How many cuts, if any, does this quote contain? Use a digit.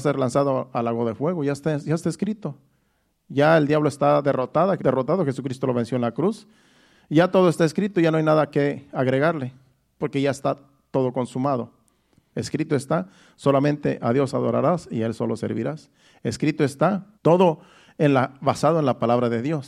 3